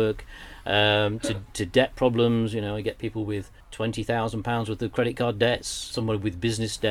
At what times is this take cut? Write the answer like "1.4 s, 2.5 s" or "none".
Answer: 3.6 s, 5.9 s